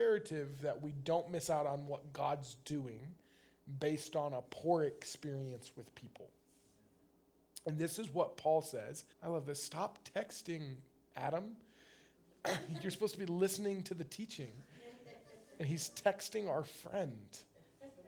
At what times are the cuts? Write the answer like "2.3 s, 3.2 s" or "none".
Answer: 9.1 s